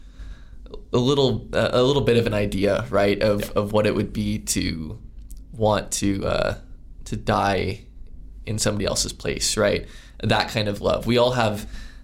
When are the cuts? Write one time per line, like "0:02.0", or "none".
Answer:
none